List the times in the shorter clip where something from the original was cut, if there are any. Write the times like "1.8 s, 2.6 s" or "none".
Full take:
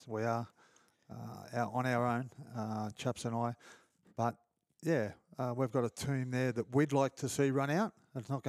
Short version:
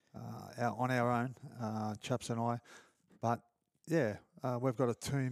none